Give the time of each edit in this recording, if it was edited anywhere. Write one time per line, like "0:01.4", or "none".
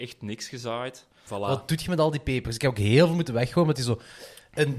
0:01.3